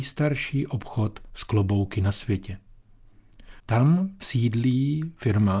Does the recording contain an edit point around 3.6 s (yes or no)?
yes